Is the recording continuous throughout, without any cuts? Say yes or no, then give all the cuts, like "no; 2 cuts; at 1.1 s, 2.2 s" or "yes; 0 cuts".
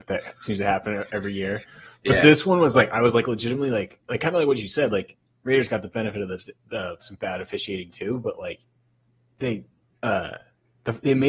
no; 1 cut; at 7.0 s